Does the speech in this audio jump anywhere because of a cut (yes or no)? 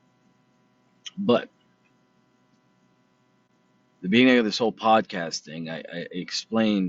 no